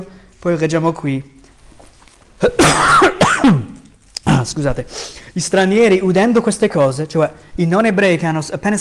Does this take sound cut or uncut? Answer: uncut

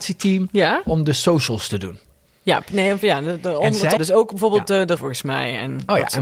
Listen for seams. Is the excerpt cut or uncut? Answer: cut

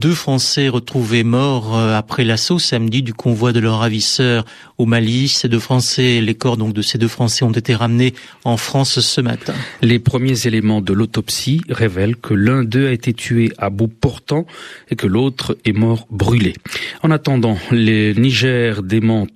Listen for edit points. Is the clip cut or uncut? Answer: uncut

